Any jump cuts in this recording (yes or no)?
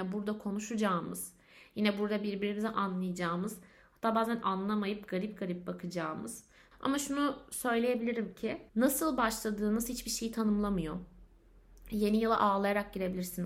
yes